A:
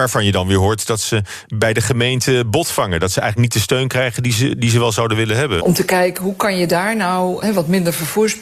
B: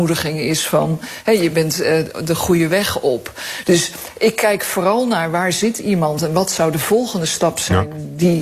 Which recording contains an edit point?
A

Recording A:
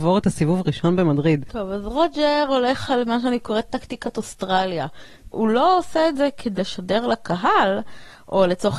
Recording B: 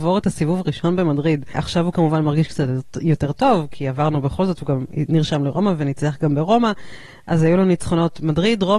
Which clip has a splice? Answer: A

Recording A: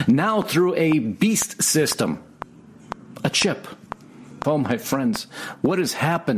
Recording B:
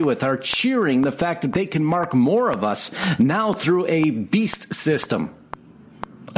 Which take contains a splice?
A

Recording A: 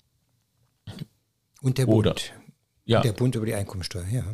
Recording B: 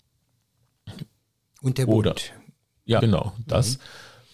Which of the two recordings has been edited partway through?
B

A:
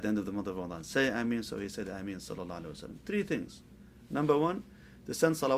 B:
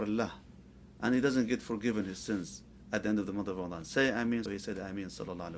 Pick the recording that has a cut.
B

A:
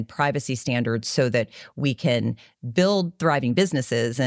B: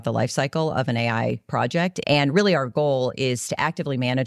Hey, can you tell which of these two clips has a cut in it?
B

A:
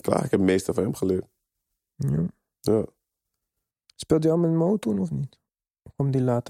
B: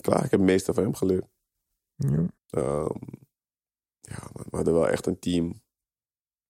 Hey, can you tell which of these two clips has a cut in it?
B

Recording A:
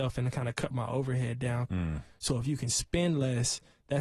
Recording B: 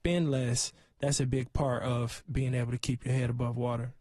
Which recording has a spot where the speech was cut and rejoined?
A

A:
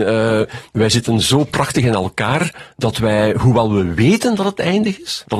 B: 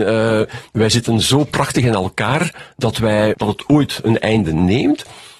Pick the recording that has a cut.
B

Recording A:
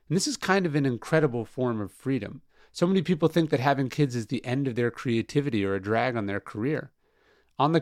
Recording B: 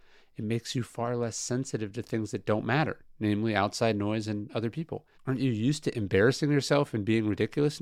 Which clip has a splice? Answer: B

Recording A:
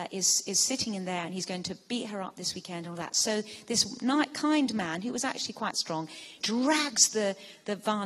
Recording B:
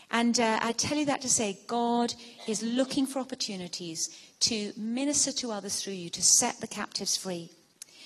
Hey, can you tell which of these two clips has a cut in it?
A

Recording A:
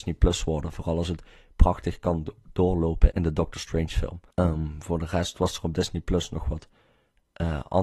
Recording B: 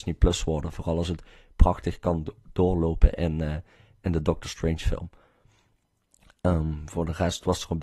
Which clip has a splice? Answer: A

